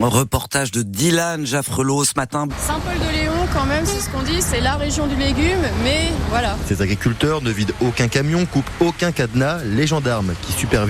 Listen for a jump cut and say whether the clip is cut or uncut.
cut